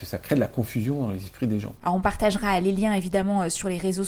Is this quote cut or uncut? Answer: cut